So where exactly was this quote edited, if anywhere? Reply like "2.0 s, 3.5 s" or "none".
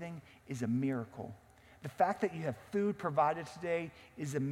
none